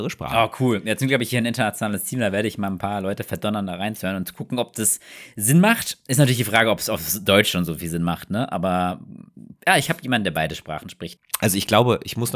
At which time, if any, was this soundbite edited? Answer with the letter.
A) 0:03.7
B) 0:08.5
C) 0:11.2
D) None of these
C